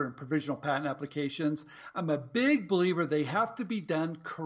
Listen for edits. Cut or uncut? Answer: uncut